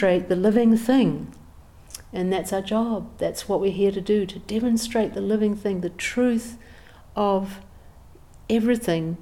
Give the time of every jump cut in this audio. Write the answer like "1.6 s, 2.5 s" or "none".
none